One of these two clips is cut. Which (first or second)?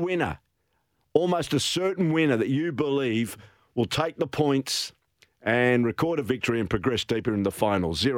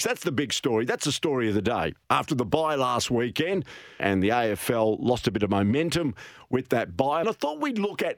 second